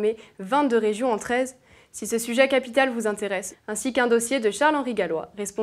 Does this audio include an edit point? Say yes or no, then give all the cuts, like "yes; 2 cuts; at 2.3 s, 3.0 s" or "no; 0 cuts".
yes; 1 cut; at 3.5 s